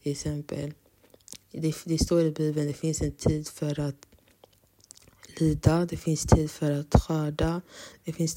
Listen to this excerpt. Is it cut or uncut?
uncut